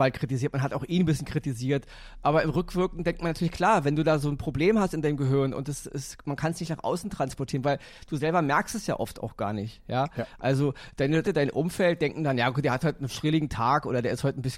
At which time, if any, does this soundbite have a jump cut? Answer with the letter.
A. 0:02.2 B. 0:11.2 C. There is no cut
B